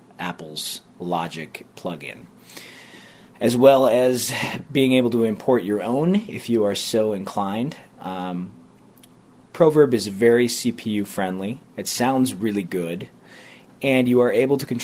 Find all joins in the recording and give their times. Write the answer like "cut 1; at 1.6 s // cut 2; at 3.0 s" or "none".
none